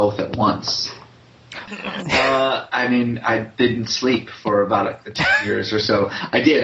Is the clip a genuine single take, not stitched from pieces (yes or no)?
no